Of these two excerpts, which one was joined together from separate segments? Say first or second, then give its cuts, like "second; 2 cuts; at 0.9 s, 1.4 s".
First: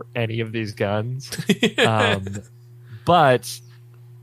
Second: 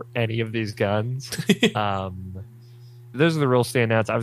second; 2 cuts; at 1.7 s, 3.1 s